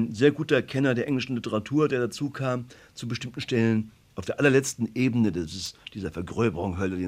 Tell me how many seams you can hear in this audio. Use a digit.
0